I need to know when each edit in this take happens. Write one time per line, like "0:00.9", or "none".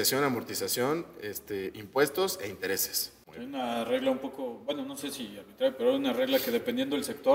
none